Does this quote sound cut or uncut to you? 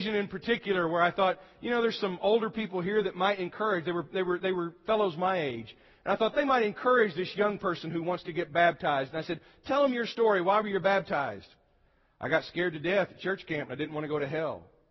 uncut